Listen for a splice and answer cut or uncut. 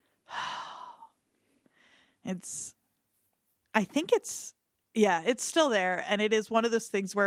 uncut